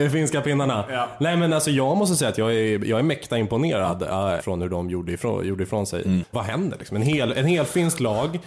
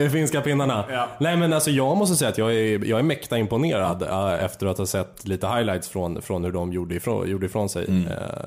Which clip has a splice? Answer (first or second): first